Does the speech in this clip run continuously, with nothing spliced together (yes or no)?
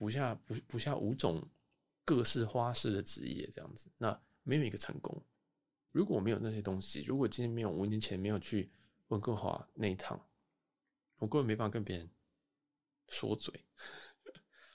no